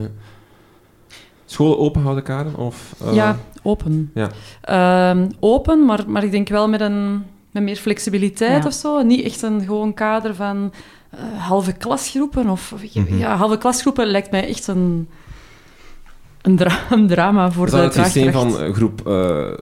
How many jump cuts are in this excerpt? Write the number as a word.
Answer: zero